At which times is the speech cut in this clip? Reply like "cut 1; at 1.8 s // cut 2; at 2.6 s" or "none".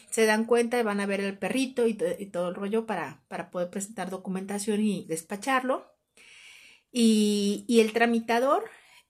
cut 1; at 5.0 s